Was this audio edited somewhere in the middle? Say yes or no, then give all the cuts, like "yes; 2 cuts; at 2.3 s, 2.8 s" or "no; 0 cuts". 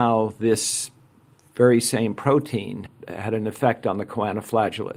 no; 0 cuts